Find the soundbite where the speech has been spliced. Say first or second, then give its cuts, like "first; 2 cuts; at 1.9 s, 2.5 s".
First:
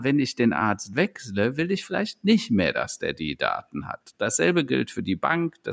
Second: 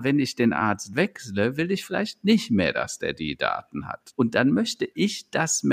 second; 1 cut; at 4.1 s